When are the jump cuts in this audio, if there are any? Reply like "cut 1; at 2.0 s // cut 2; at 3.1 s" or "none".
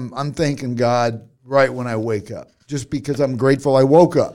none